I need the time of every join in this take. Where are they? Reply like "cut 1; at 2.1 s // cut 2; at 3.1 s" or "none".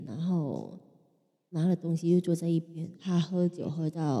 cut 1; at 2.9 s